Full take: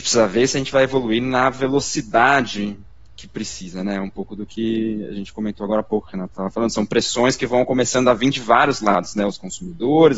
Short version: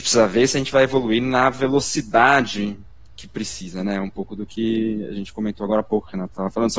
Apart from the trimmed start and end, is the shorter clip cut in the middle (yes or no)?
no